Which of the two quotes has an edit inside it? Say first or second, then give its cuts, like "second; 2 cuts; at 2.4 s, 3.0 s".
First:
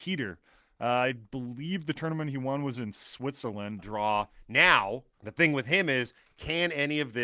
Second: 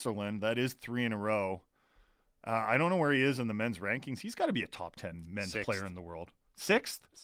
first; 2 cuts; at 3.8 s, 5.1 s